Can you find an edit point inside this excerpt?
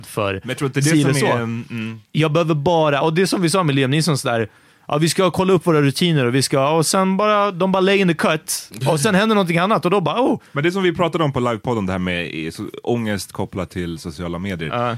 no; 0 cuts

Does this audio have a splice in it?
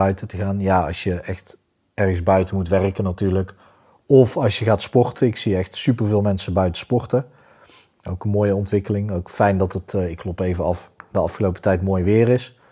no; 0 cuts

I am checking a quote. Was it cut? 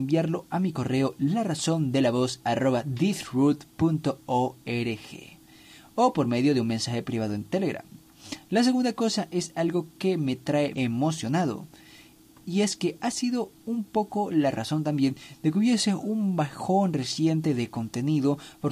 yes; 1 cut; at 10.7 s

